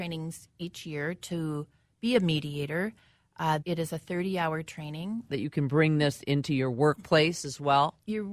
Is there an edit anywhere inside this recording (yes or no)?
yes